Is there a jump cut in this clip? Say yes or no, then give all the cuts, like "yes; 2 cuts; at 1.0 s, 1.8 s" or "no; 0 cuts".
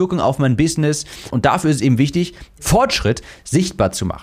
yes; 2 cuts; at 1.3 s, 2.6 s